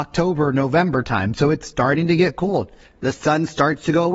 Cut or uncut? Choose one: uncut